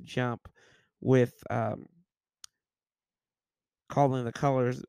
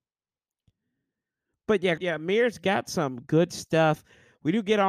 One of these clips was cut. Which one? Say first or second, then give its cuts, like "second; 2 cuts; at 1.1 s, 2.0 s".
second; 1 cut; at 2.0 s